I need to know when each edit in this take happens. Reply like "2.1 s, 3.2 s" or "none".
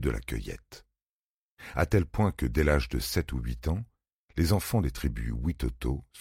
none